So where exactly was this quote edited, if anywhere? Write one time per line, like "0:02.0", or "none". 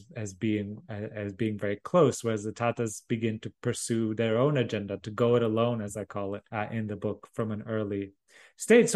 0:06.5